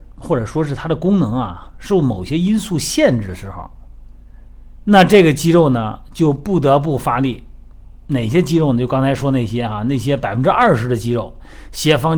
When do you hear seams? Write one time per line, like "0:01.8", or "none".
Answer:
none